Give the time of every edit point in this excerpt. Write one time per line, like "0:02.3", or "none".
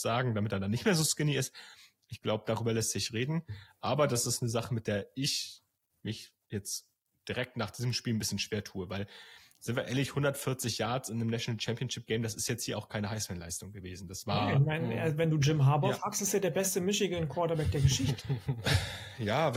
none